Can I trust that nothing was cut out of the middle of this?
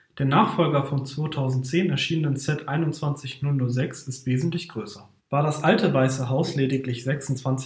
no; 1 cut; at 5.2 s

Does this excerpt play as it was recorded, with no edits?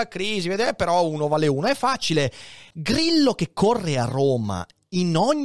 no; 1 cut; at 2.7 s

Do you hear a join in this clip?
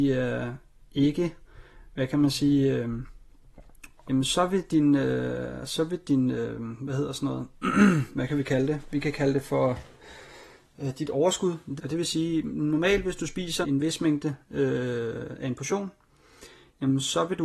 yes; 3 cuts; at 4.0 s, 11.8 s, 13.6 s

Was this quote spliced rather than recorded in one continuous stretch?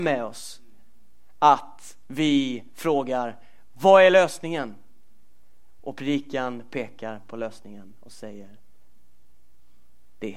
no; 0 cuts

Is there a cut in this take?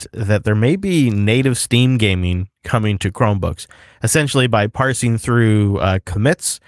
no; 0 cuts

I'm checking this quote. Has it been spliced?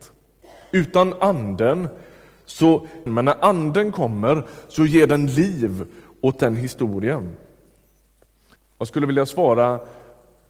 yes; 2 cuts; at 3.1 s, 8.6 s

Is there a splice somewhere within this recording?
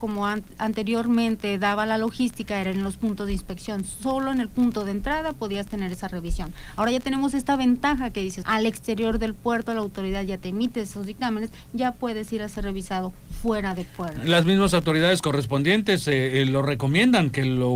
yes; 1 cut; at 8.4 s

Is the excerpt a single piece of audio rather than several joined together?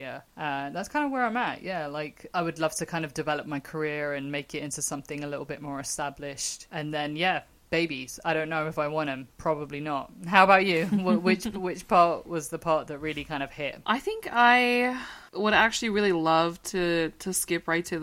yes; 0 cuts

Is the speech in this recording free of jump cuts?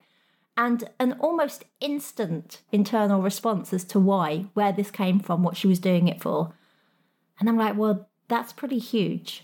yes; 0 cuts

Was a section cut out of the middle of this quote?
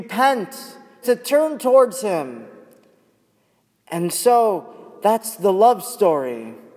yes; 1 cut; at 1.0 s

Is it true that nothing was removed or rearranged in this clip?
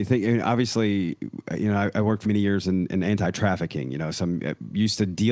no; 1 cut; at 2.2 s

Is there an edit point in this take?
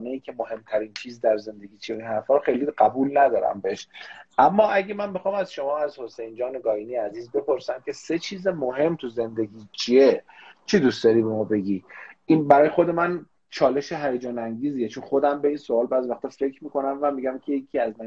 no; 0 cuts

